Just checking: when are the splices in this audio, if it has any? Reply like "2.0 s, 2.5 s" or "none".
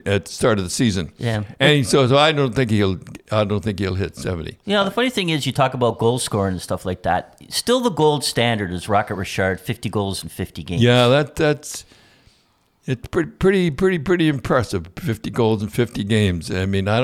none